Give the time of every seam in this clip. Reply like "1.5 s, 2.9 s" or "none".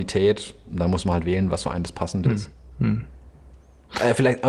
none